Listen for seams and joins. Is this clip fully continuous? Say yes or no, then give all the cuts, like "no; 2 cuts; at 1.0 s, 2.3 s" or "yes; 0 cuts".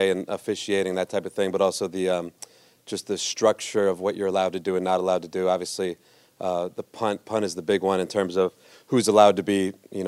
yes; 0 cuts